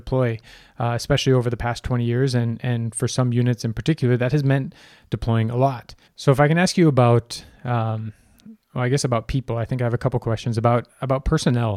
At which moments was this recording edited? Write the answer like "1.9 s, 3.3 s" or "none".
6.1 s